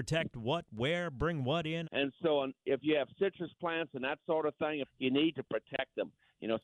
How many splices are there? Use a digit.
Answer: 2